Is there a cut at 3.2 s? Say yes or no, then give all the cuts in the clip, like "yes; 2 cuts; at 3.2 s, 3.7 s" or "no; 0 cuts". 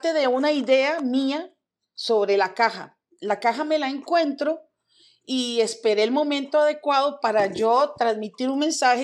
no; 0 cuts